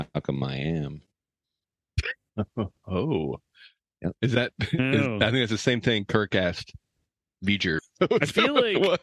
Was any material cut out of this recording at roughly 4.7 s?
no; 1 cut; at 7.8 s

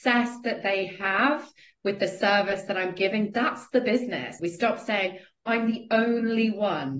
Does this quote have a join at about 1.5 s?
no; 1 cut; at 4.4 s

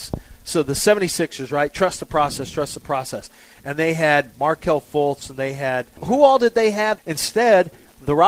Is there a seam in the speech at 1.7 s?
no; 2 cuts; at 6.0 s, 7.0 s

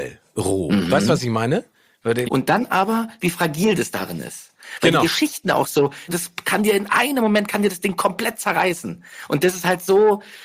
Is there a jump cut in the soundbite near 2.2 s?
yes; 2 cuts; at 2.2 s, 6.1 s

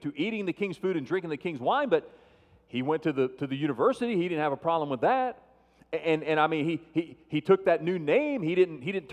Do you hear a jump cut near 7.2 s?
no; 0 cuts

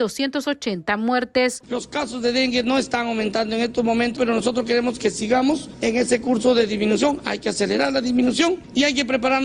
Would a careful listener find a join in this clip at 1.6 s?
yes; 2 cuts; at 1.6 s, 4.2 s

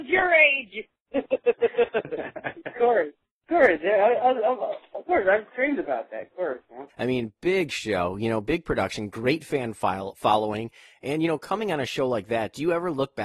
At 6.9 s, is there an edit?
yes; 1 cut; at 6.9 s

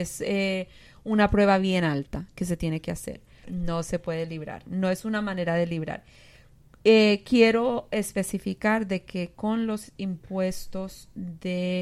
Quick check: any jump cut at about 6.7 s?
no; 1 cut; at 3.4 s

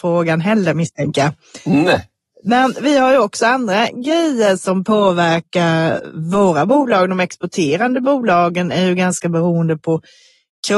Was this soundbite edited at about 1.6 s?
no; 0 cuts

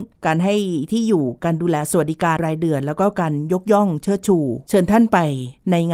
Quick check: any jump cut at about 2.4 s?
yes; 1 cut; at 2.4 s

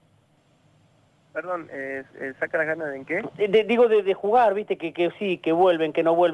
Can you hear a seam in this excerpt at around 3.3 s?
no; 0 cuts

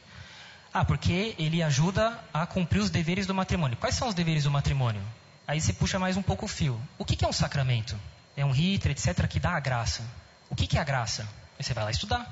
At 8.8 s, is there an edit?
yes; 2 cuts; at 5.4 s, 8.8 s

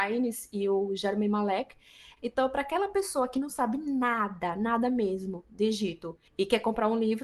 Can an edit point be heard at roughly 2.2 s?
yes; 1 cut; at 2.2 s

